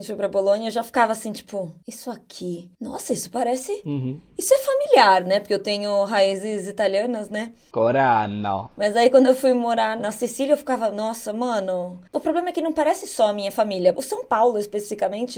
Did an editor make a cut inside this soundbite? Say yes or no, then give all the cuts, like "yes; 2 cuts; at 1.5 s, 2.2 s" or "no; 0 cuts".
yes; 2 cuts; at 12.1 s, 13.9 s